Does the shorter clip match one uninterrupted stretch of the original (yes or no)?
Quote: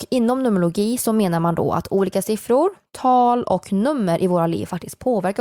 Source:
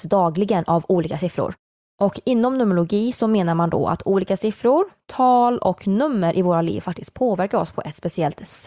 yes